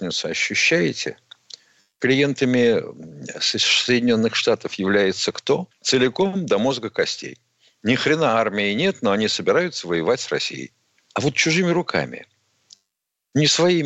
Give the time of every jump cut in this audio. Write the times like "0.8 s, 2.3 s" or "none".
5.7 s, 11.1 s